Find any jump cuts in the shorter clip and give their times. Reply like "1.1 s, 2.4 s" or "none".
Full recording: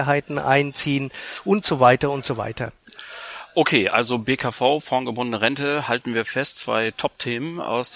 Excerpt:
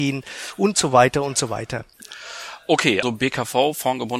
3.0 s